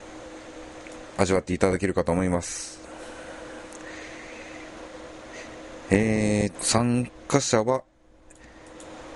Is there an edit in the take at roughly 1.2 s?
yes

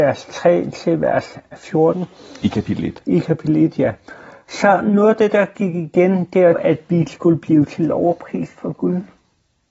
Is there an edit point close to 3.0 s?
no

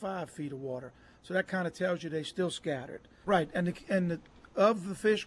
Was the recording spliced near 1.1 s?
no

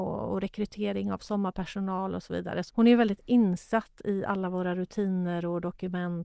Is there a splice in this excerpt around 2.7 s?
yes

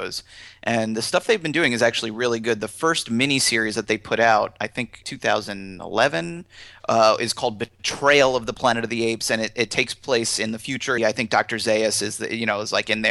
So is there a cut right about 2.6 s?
no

